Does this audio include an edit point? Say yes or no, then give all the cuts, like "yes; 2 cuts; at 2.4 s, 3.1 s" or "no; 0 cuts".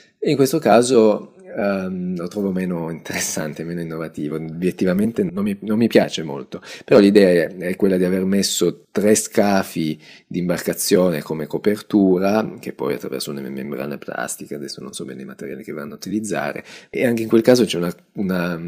no; 0 cuts